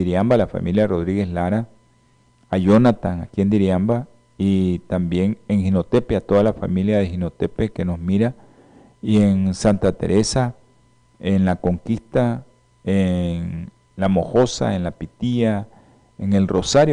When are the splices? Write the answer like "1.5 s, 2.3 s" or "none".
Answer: none